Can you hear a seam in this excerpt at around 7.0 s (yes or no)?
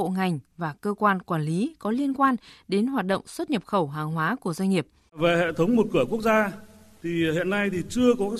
no